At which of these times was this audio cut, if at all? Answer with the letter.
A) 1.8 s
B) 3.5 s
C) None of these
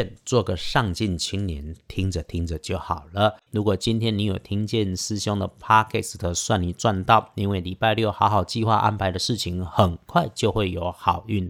B